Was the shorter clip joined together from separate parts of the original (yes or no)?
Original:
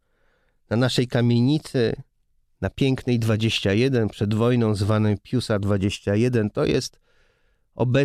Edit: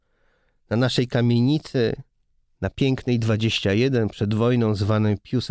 no